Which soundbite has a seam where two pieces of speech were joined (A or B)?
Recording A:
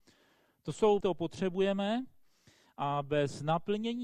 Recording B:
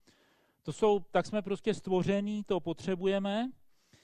A